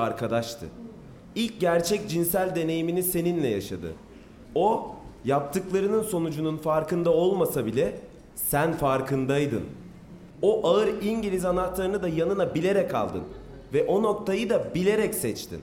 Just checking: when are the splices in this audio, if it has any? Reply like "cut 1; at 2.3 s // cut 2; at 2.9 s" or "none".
cut 1; at 4.4 s // cut 2; at 10.3 s